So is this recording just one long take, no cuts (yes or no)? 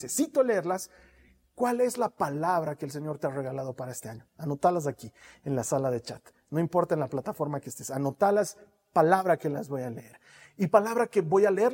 yes